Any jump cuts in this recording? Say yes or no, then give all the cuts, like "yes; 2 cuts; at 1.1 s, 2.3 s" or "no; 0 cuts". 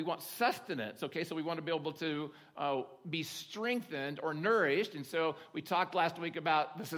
no; 0 cuts